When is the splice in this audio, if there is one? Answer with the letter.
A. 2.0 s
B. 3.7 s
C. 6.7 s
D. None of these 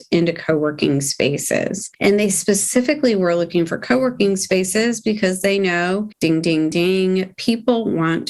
D